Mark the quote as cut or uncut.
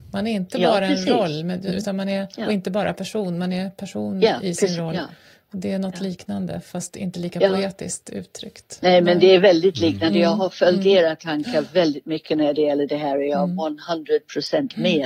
uncut